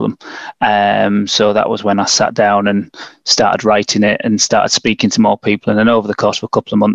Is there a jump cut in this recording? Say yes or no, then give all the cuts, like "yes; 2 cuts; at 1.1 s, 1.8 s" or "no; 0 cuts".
no; 0 cuts